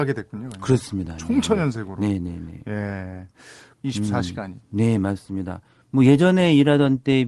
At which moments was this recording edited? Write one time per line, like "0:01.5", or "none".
0:03.7